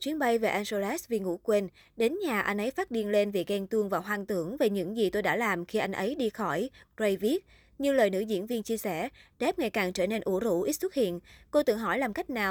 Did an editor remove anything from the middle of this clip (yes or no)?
no